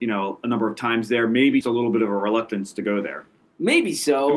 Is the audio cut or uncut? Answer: cut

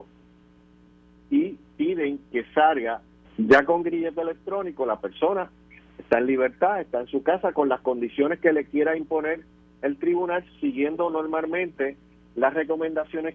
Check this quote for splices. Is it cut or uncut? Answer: cut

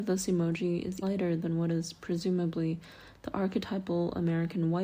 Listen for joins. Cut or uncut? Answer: cut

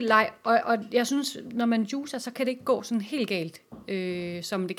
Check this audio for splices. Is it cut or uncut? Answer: uncut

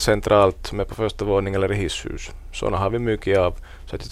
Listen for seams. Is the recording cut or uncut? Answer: uncut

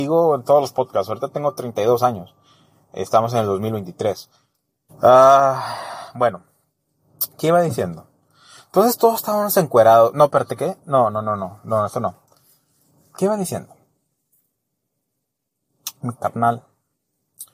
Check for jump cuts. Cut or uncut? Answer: cut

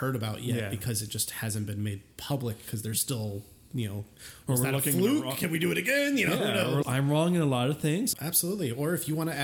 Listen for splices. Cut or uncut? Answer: cut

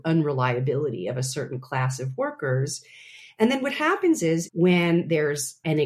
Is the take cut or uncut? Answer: cut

